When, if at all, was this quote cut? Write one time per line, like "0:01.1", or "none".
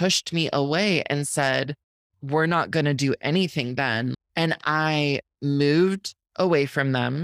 0:04.1